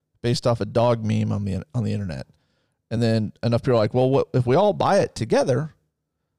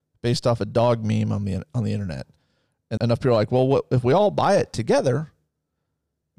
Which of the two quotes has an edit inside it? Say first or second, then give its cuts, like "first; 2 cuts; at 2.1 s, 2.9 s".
second; 1 cut; at 3.0 s